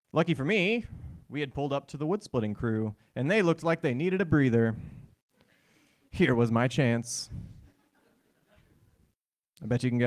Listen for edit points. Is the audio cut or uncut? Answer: uncut